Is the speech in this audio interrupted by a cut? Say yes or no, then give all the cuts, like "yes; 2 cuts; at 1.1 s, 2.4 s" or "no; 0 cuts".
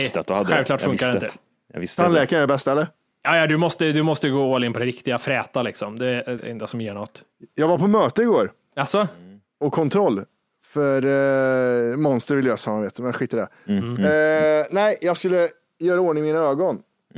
yes; 1 cut; at 6.4 s